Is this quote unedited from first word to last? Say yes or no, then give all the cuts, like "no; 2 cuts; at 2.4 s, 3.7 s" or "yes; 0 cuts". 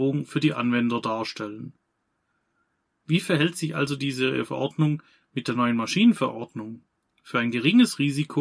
no; 2 cuts; at 2.9 s, 7.0 s